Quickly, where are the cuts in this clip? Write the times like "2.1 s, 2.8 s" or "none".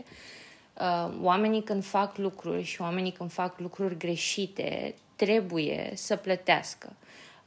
none